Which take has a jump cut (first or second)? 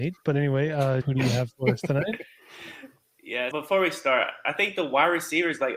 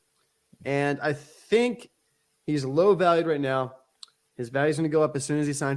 first